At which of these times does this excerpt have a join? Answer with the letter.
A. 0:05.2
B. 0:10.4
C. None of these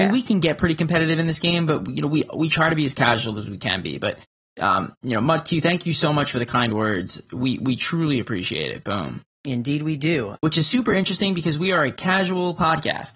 B